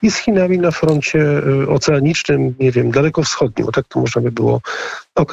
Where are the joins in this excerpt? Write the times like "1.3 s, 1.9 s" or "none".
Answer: none